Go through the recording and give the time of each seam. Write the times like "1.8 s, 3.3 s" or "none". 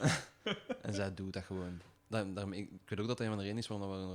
1.9 s